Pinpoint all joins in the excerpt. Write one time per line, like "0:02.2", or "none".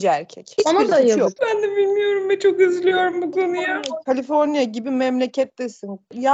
0:01.4